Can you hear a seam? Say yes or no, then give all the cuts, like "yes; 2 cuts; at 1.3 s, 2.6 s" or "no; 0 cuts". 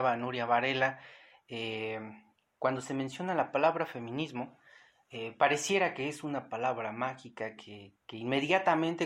no; 0 cuts